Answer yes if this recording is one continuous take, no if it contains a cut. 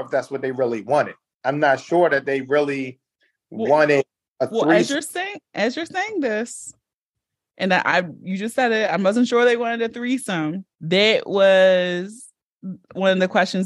no